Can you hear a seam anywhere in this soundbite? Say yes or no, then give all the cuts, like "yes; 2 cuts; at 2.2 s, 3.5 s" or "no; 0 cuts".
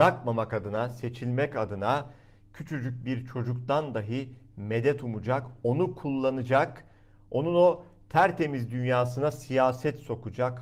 no; 0 cuts